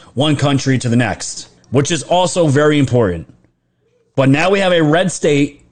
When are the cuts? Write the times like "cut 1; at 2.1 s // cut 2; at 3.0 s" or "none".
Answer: cut 1; at 1.6 s